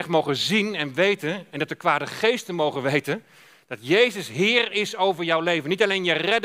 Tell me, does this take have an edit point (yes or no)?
no